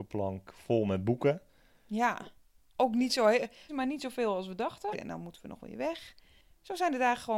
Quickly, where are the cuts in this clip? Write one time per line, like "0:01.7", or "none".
0:03.7
0:04.9